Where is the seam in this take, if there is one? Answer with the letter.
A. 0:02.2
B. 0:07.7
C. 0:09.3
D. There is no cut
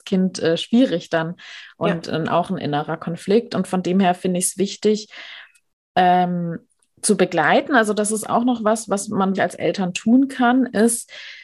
C